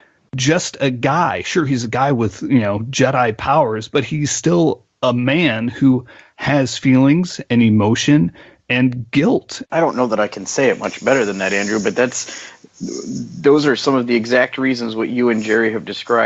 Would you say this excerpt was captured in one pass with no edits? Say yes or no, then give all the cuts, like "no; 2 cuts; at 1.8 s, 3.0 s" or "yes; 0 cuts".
no; 1 cut; at 9.6 s